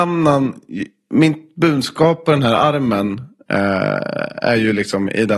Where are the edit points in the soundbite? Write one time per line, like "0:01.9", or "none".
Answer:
none